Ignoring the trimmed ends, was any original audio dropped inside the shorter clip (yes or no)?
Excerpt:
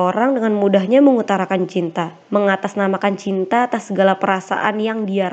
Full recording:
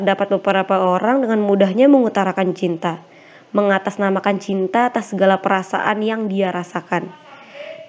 yes